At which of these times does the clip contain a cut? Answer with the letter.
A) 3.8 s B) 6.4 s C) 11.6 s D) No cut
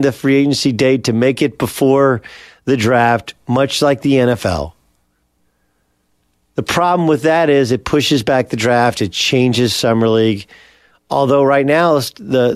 D